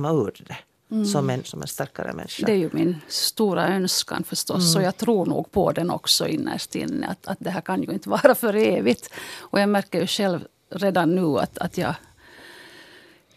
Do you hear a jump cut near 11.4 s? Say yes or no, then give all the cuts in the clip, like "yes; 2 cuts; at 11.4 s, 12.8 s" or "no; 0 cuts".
no; 1 cut; at 1.4 s